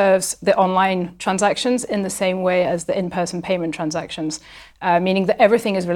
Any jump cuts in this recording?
no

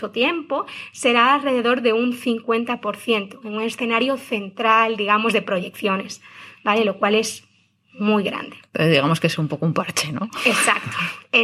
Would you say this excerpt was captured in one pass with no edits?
yes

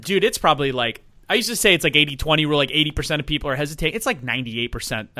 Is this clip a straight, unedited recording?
yes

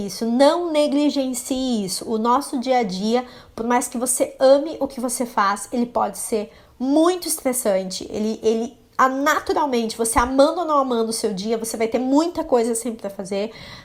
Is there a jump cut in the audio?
no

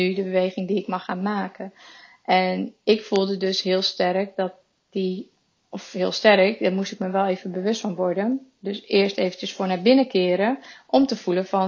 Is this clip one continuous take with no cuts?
yes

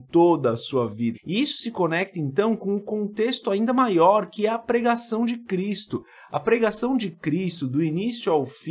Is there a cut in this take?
yes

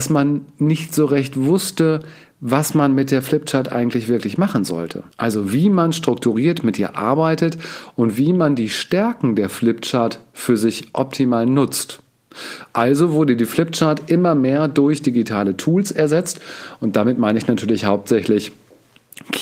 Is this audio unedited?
no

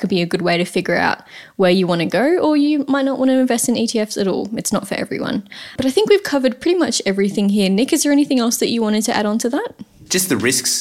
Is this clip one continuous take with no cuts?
no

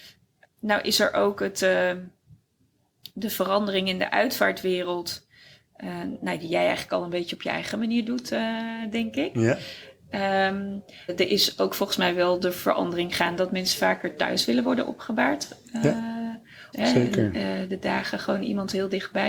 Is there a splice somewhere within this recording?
yes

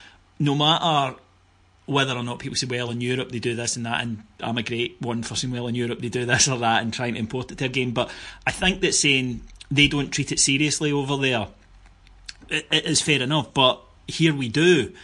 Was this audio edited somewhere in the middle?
no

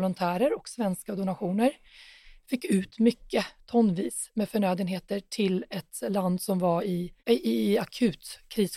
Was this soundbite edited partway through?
yes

